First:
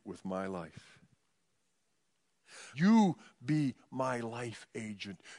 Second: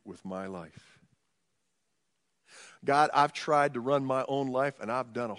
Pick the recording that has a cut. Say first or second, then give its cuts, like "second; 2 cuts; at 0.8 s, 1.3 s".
first; 1 cut; at 2.7 s